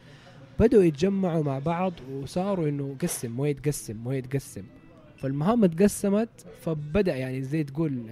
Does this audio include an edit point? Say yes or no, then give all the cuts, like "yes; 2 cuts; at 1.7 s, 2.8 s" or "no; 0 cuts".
no; 0 cuts